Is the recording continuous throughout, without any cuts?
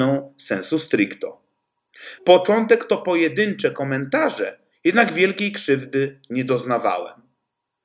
no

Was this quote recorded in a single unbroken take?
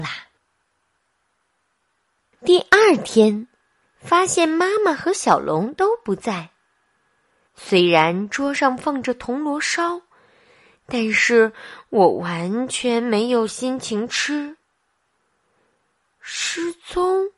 no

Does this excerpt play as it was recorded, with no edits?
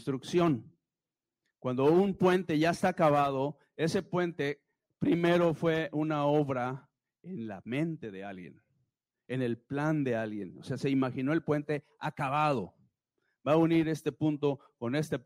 yes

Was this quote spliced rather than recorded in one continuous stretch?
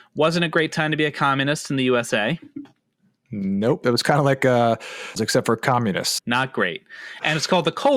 yes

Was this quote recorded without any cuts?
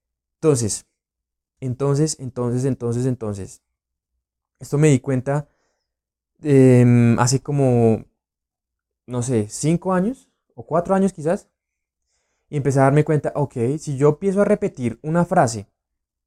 yes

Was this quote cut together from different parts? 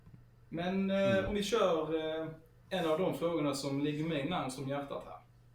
no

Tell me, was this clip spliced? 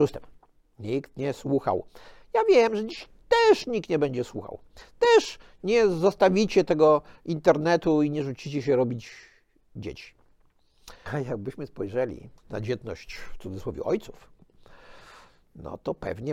yes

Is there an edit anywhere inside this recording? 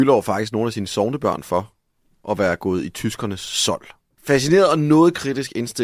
yes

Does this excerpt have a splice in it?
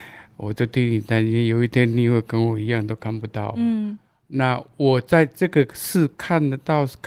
no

